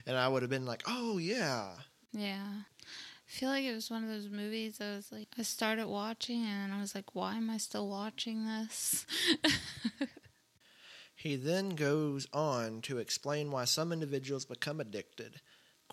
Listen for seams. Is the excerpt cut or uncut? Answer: cut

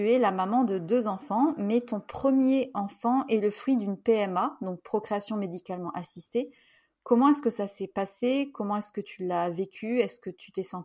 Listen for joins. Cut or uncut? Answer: uncut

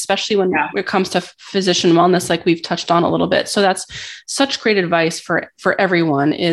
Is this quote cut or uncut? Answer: uncut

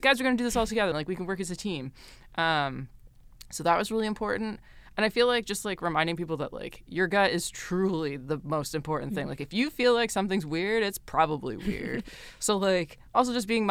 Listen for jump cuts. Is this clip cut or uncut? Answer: cut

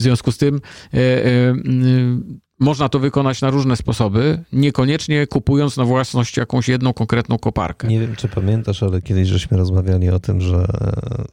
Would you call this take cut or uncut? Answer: uncut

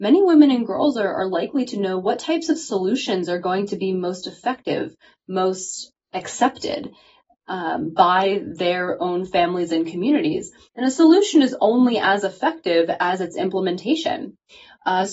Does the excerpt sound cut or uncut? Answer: uncut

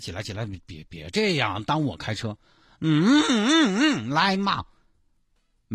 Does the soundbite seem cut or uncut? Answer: uncut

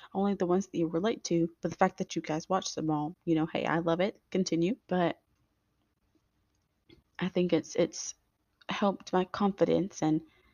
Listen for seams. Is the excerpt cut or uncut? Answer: cut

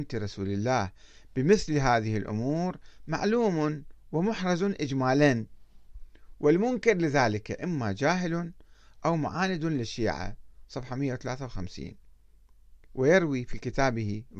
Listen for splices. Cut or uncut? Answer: cut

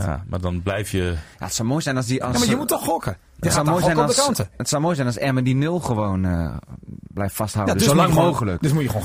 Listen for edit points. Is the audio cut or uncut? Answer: uncut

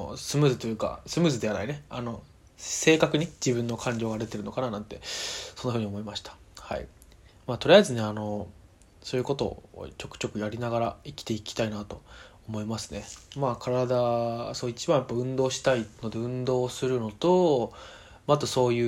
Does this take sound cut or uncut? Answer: uncut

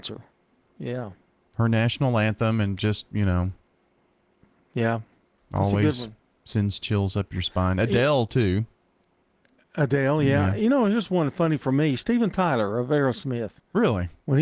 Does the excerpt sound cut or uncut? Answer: uncut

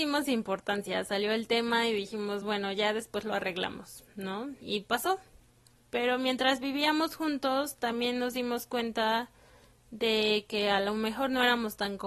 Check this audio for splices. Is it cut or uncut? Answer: uncut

